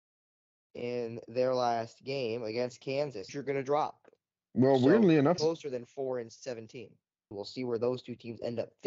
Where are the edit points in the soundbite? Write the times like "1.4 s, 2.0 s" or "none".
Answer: 3.3 s, 5.4 s, 7.3 s